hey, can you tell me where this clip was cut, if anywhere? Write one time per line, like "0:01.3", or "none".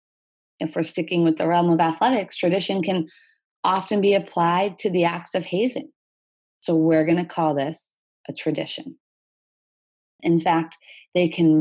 0:06.5
0:10.2